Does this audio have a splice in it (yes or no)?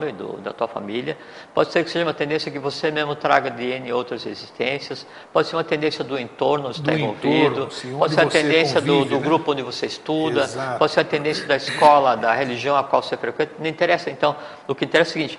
no